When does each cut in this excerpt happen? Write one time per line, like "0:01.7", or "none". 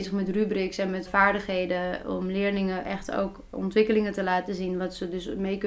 0:01.1